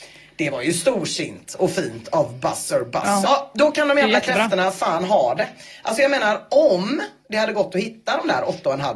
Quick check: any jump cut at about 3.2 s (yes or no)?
yes